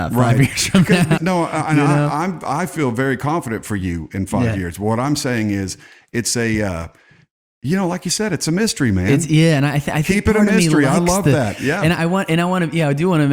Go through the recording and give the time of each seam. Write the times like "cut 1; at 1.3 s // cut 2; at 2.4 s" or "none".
cut 1; at 1.2 s // cut 2; at 11.6 s